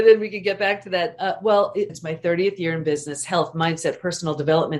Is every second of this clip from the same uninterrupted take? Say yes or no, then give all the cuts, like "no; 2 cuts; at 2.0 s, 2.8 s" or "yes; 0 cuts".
no; 1 cut; at 1.9 s